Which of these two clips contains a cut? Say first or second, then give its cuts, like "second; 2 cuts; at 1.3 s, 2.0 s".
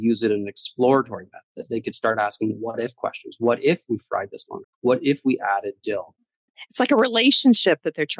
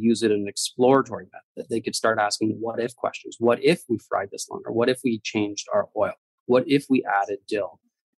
first; 1 cut; at 4.6 s